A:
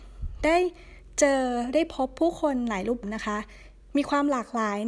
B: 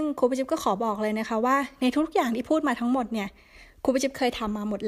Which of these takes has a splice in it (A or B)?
A